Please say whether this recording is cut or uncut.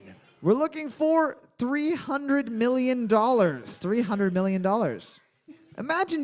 uncut